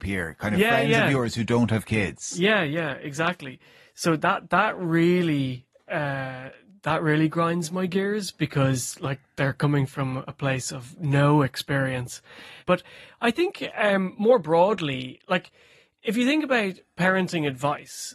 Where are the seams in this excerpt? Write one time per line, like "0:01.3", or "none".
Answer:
0:12.6

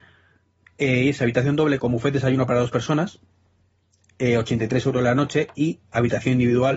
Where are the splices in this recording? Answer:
0:01.8

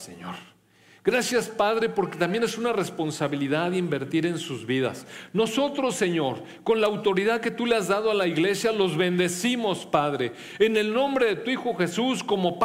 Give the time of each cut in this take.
none

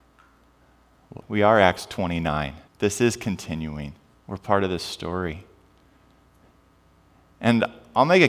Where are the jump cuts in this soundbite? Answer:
0:01.2
0:02.7
0:04.1

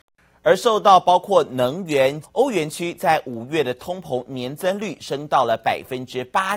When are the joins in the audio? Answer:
0:02.2

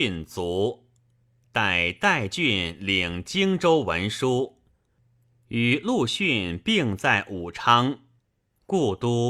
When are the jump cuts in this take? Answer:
none

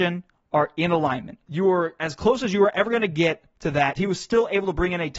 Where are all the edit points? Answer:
0:01.4
0:04.0

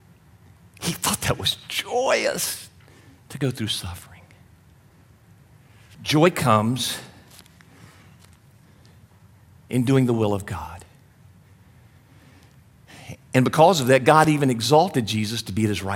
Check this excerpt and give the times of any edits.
none

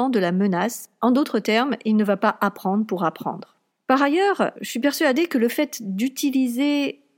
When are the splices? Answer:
0:04.6

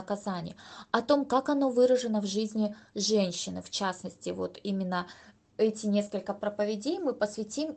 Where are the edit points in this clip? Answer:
none

